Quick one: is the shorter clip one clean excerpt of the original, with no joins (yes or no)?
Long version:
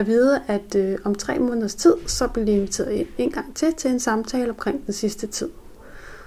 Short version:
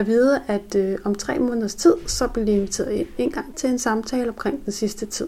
no